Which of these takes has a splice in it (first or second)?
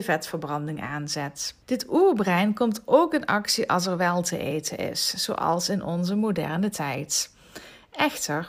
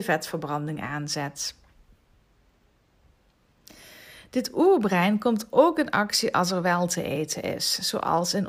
first